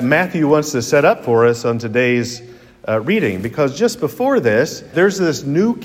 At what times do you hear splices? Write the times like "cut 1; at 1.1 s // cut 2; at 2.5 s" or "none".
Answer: cut 1; at 4.9 s